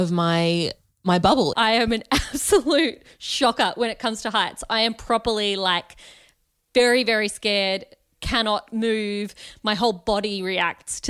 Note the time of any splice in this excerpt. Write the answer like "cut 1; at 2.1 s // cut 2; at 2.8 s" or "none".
cut 1; at 1.5 s

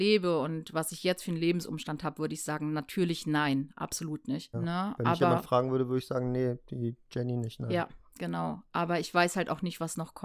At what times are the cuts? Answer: cut 1; at 4.5 s

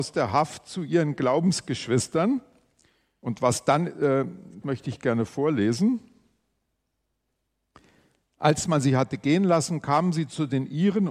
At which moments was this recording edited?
cut 1; at 4.6 s

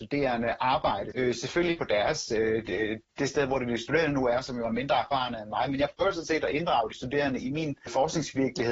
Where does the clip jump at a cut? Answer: cut 1; at 1.1 s

